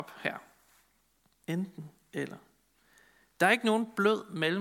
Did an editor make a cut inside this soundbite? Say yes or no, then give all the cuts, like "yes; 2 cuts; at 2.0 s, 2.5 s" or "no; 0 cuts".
yes; 1 cut; at 1.4 s